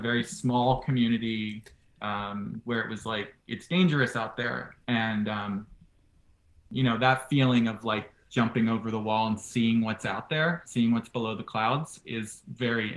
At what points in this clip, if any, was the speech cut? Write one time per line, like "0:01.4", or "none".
0:04.8